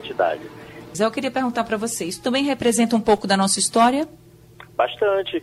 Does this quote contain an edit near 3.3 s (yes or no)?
no